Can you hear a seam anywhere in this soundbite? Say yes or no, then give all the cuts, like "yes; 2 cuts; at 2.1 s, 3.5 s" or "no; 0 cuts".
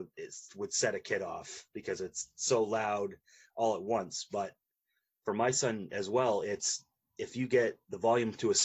no; 0 cuts